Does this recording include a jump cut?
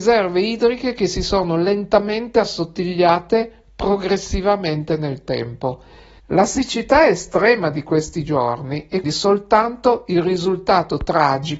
yes; 2 cuts; at 6.2 s, 9.0 s

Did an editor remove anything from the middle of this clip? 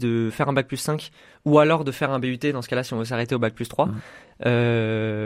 no; 0 cuts

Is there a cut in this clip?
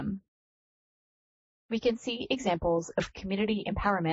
no; 0 cuts

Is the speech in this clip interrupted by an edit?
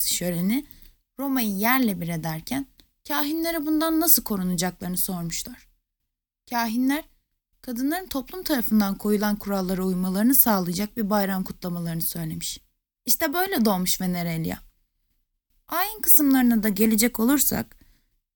no; 0 cuts

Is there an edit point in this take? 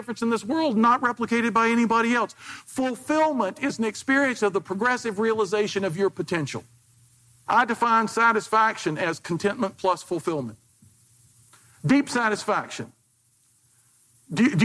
yes; 1 cut; at 7.5 s

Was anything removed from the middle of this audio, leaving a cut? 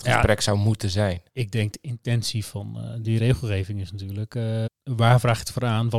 yes; 2 cuts; at 1.3 s, 4.7 s

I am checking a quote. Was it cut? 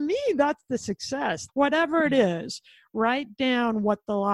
yes; 1 cut; at 1.5 s

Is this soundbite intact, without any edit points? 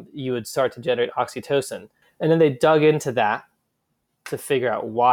no; 1 cut; at 2.0 s

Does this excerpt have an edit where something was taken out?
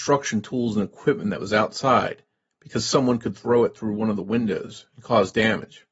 no; 0 cuts

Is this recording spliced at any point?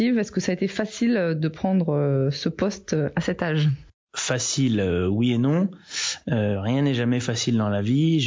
no; 0 cuts

